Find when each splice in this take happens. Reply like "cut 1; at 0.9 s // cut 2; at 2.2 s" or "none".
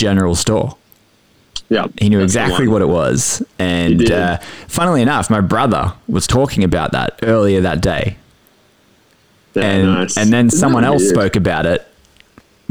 none